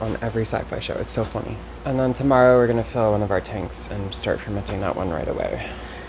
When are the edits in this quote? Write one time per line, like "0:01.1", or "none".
0:01.8